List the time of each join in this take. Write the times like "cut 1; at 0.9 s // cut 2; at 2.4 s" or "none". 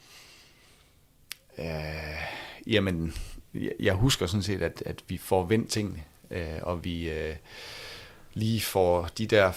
none